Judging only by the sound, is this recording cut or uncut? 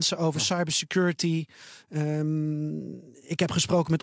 uncut